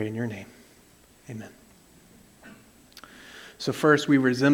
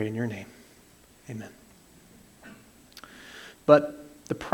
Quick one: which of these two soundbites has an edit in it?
second; 1 cut; at 3.5 s

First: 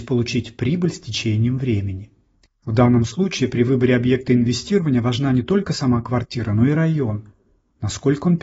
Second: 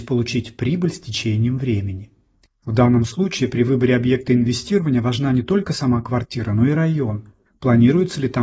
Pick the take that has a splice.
second; 1 cut; at 7.5 s

